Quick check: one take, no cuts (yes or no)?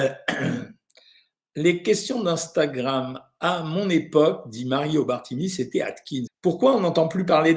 no